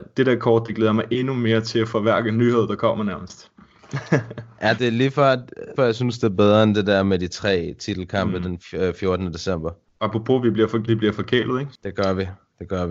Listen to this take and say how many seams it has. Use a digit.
3